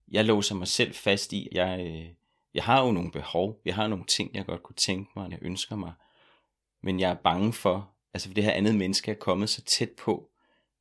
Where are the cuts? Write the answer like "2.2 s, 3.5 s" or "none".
1.5 s, 5.3 s